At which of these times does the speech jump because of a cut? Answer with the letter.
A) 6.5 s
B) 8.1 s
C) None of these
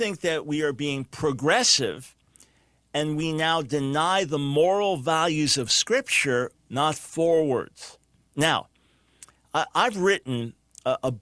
A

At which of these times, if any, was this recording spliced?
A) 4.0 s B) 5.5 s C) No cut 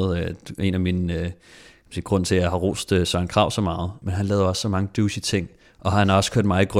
A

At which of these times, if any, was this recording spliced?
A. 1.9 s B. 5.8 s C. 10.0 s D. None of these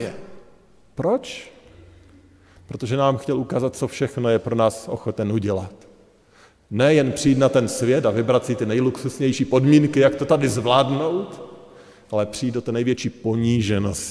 D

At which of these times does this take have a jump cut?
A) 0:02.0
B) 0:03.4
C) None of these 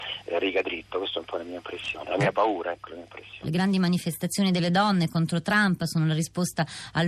B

